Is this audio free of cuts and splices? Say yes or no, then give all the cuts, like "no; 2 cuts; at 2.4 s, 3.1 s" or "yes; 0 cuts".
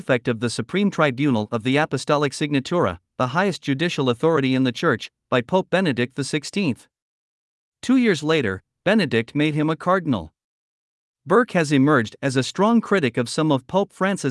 yes; 0 cuts